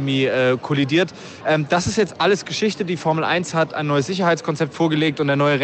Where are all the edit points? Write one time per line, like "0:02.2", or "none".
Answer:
0:01.4